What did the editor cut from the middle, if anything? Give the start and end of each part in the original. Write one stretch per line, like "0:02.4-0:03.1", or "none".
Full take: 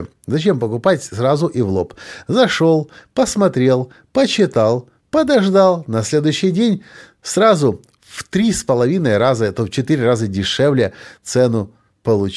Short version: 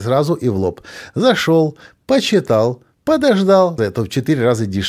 0:03.1-0:04.1
0:05.8-0:09.4